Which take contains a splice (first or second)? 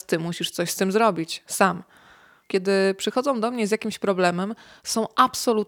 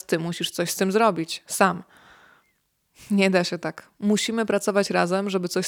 first